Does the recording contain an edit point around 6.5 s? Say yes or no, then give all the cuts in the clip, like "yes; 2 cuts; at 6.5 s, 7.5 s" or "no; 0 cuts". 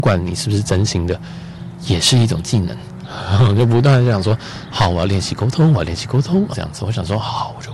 yes; 1 cut; at 6.5 s